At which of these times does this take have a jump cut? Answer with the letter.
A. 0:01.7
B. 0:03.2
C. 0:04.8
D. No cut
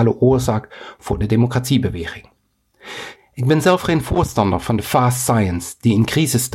B